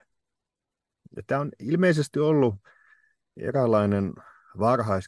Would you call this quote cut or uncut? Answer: cut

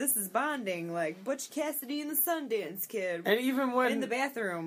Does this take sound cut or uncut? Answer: cut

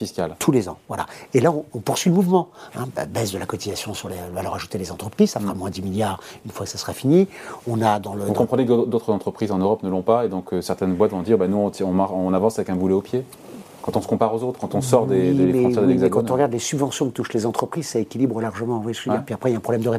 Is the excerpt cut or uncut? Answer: uncut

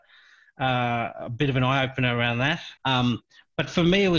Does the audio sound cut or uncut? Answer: cut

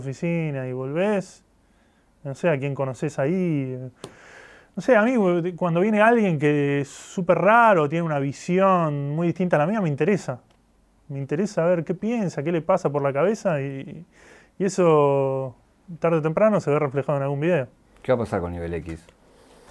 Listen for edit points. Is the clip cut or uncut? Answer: uncut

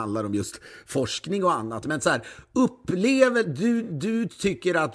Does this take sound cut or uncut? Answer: uncut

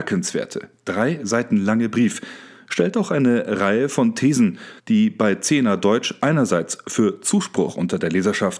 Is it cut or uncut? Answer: cut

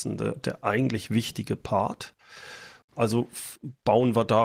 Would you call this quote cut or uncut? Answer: cut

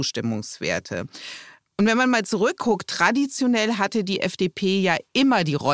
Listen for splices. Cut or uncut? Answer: uncut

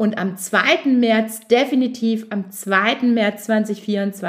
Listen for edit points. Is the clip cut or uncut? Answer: uncut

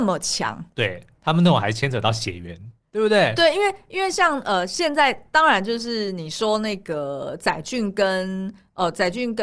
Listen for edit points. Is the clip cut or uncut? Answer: uncut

